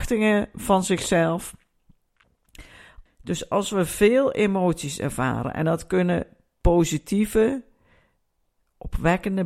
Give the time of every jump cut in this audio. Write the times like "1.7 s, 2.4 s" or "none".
3.1 s